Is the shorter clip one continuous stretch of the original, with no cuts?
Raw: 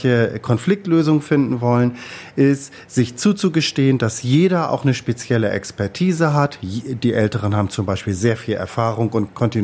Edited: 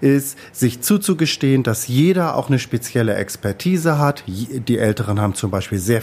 yes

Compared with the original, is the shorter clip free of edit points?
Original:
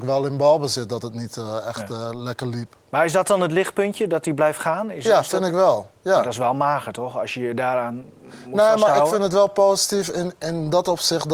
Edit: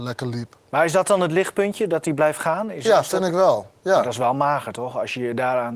yes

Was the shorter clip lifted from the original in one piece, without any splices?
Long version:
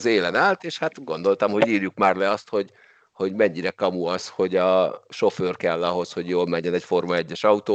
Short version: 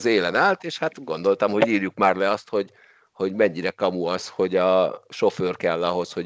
yes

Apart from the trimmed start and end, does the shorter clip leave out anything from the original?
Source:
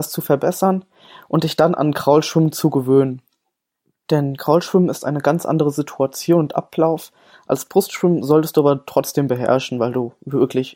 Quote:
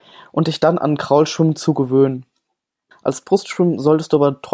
yes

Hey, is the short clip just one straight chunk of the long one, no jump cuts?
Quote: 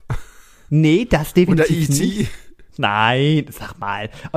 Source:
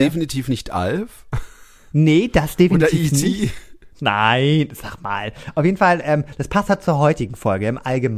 yes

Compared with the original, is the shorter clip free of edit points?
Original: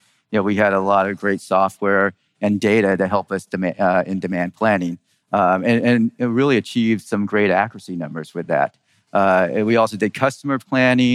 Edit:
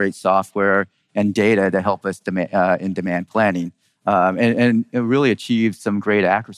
yes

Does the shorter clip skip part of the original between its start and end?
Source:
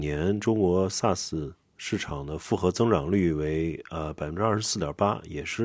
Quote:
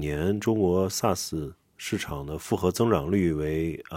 no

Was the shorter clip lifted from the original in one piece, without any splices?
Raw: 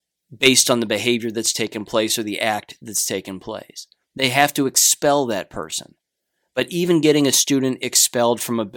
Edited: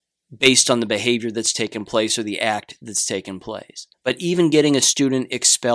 no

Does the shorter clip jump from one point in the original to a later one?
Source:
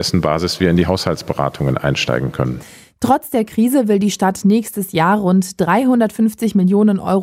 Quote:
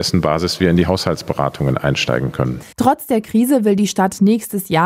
yes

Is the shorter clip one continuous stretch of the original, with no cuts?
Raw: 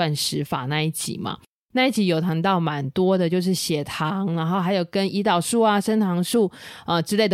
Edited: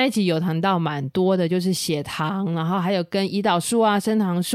yes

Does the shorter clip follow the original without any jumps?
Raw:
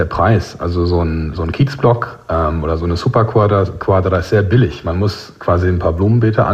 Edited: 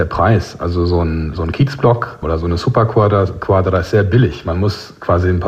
no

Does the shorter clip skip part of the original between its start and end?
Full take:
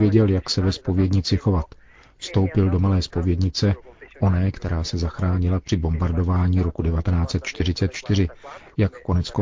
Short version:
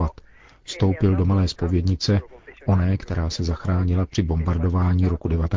no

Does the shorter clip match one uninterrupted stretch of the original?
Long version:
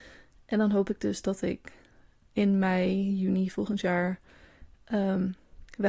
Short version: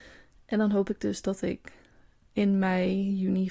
yes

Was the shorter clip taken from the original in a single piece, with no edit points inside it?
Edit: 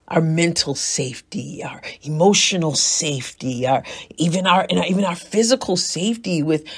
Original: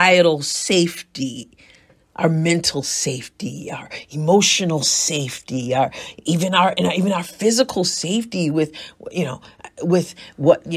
yes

